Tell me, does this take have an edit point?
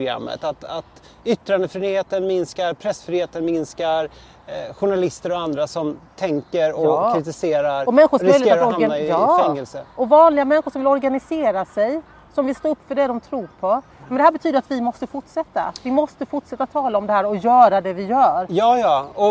no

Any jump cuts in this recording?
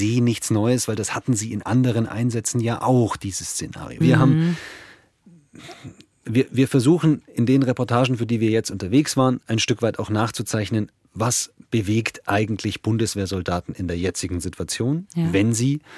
yes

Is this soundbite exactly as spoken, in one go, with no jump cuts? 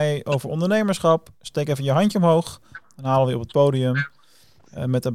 yes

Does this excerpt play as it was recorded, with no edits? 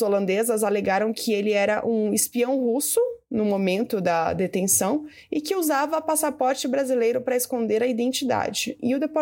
yes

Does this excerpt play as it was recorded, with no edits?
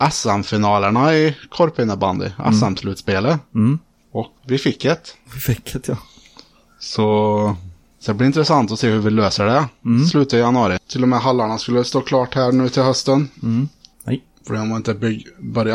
no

